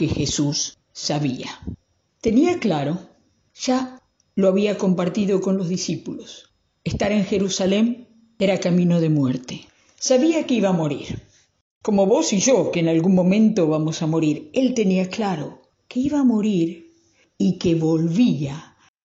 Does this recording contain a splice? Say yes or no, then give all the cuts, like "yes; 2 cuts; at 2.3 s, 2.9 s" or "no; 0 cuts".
no; 0 cuts